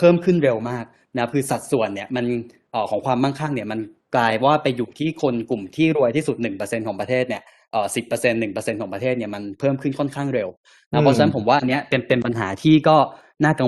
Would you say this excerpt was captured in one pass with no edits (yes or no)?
yes